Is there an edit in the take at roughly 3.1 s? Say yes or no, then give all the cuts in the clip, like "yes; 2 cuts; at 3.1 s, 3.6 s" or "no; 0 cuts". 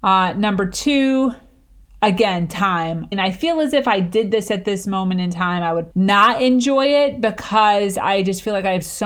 yes; 2 cuts; at 3.1 s, 5.9 s